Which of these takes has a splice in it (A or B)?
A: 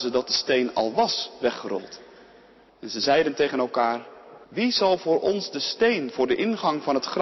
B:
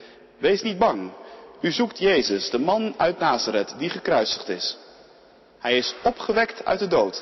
A